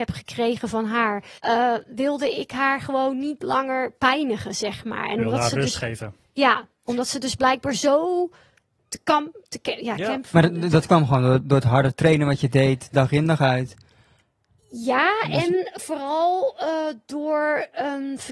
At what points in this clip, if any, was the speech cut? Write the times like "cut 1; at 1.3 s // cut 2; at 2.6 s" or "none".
cut 1; at 1.4 s